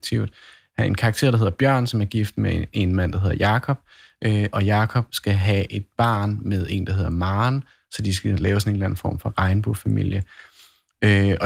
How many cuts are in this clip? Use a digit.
1